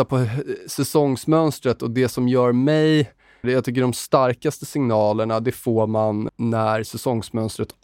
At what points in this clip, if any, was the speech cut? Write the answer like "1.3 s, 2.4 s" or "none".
3.4 s, 6.3 s